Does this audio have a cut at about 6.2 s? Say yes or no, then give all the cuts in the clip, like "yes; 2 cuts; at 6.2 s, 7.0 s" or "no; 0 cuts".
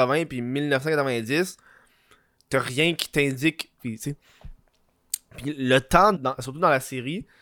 yes; 2 cuts; at 3.8 s, 6.2 s